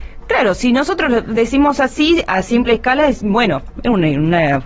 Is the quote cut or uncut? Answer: uncut